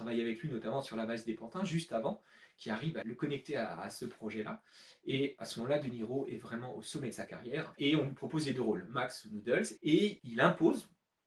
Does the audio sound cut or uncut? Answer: cut